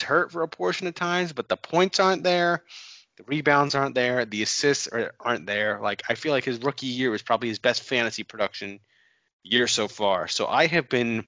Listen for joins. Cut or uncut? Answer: uncut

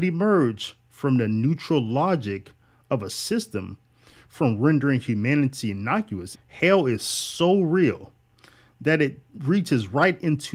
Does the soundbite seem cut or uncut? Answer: cut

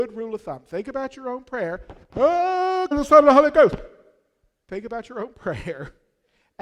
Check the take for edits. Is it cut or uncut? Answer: cut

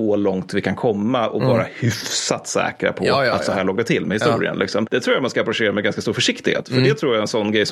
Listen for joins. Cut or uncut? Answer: cut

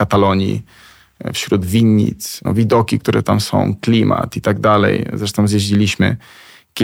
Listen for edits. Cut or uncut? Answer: cut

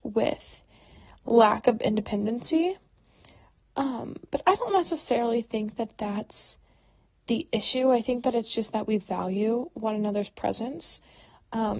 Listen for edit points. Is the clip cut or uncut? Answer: uncut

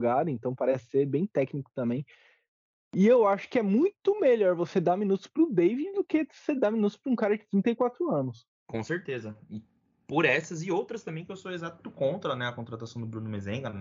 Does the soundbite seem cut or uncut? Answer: cut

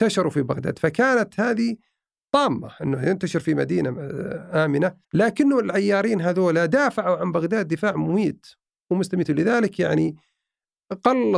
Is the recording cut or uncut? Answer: cut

